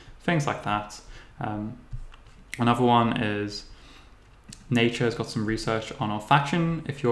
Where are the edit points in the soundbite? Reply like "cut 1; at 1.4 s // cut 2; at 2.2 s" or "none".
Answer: none